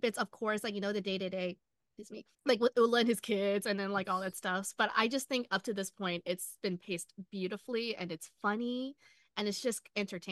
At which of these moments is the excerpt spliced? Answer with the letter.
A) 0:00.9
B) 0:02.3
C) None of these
B